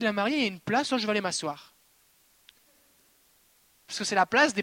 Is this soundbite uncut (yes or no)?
yes